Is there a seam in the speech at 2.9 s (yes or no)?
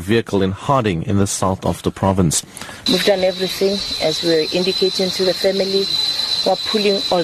yes